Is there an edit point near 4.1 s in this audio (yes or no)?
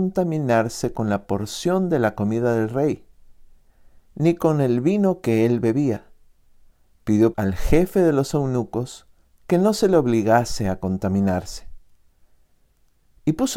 no